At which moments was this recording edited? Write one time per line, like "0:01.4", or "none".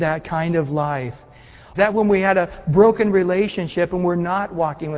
0:01.8